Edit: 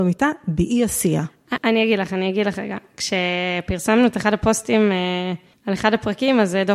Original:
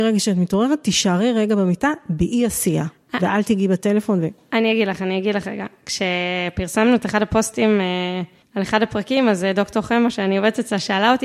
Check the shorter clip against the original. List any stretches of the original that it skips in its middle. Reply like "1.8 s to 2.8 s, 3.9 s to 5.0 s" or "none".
3.2 s to 4.5 s